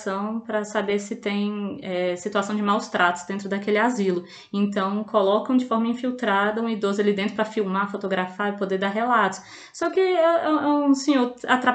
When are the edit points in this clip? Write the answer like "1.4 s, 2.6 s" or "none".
none

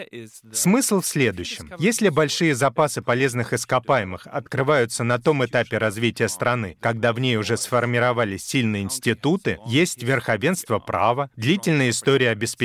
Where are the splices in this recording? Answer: none

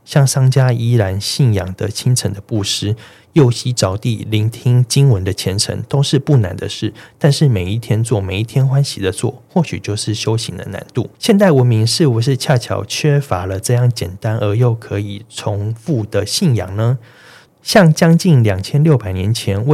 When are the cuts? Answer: 11.1 s, 17.5 s

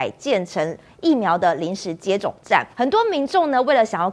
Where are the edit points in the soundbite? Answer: 2.7 s

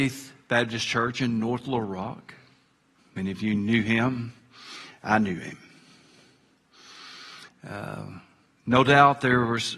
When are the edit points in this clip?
3.0 s, 7.5 s

